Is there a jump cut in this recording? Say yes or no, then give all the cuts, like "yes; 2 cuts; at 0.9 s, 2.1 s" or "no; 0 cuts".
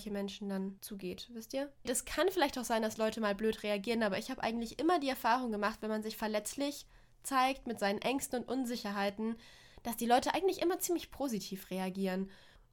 yes; 1 cut; at 1.9 s